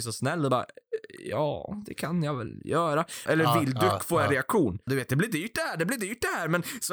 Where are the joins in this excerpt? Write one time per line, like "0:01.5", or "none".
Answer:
0:03.3
0:04.9